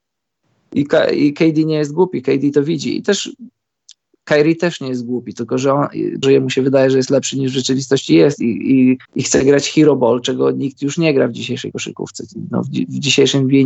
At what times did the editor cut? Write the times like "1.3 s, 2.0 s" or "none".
6.2 s, 9.0 s